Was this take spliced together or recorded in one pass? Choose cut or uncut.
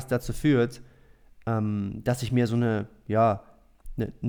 uncut